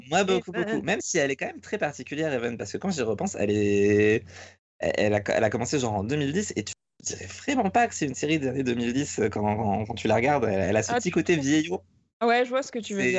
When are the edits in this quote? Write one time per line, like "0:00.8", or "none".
none